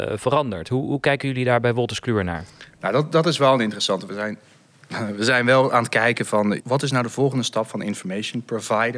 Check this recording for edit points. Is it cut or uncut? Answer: cut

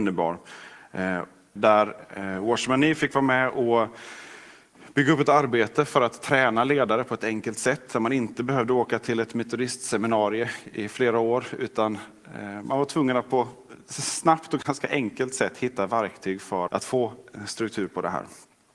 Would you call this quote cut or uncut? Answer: cut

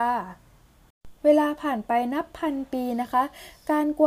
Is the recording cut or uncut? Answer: cut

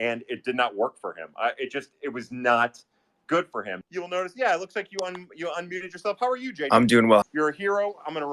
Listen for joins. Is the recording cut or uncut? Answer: cut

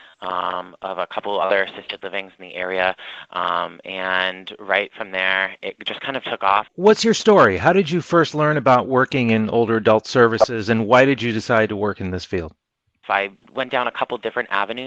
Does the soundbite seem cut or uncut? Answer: cut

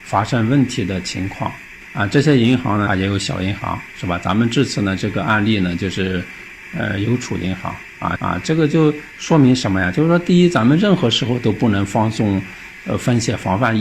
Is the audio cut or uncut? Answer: cut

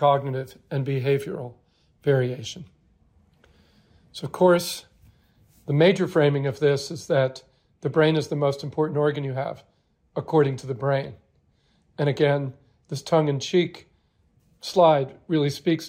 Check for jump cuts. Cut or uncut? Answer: uncut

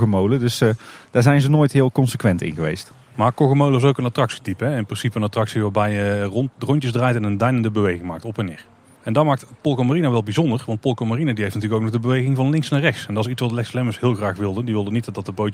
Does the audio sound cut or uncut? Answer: uncut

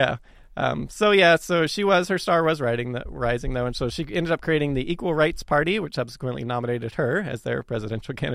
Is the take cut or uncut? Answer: uncut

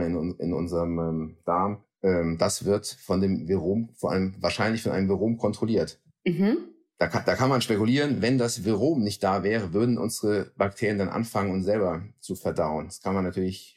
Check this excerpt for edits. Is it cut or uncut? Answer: uncut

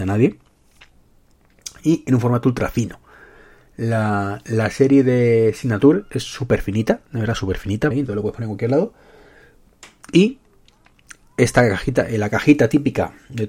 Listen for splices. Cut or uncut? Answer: cut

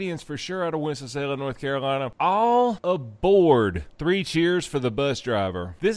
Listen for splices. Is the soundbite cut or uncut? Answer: uncut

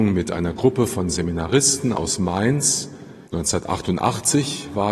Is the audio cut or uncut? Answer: cut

